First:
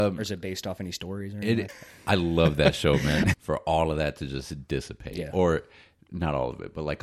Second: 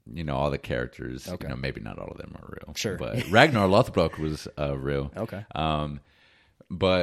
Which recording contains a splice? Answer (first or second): first